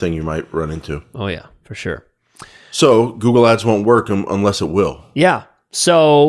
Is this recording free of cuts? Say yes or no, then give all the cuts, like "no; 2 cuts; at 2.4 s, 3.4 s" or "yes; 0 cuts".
yes; 0 cuts